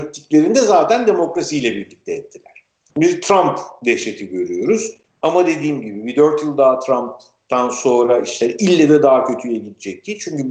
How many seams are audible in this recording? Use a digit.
2